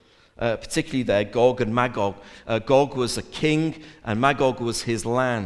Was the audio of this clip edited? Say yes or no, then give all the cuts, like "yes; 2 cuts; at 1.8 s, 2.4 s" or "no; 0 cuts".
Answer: no; 0 cuts